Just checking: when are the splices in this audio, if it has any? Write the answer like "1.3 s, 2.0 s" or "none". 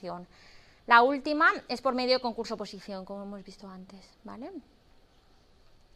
none